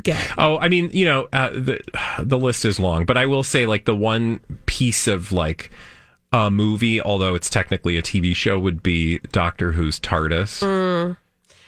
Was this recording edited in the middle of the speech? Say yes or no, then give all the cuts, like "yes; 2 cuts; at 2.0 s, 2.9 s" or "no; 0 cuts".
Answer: no; 0 cuts